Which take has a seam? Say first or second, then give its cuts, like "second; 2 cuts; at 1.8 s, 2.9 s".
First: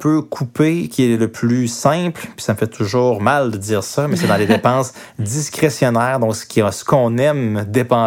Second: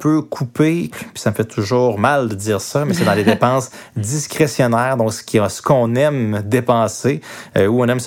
second; 1 cut; at 0.9 s